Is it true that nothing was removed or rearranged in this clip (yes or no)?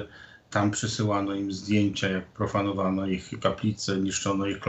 yes